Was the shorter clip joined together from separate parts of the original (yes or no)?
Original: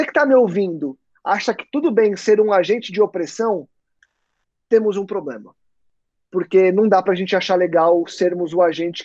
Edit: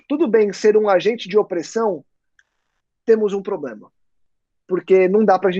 no